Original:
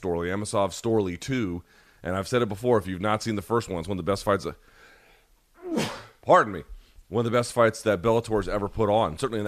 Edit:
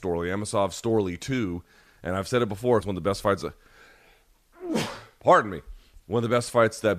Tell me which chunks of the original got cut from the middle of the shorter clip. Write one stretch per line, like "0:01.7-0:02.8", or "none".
0:02.8-0:03.8